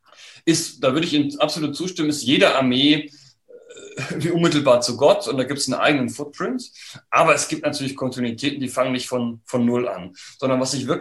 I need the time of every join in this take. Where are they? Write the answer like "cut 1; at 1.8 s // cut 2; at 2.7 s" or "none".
none